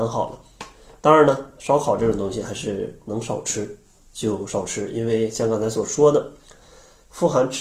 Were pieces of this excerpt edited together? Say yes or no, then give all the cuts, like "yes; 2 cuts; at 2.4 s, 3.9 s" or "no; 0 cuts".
no; 0 cuts